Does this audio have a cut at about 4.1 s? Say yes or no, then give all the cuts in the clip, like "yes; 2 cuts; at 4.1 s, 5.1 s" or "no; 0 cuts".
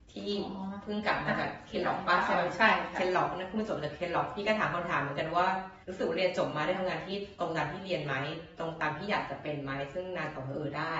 no; 1 cut; at 5.8 s